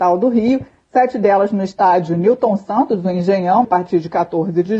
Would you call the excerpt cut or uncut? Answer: cut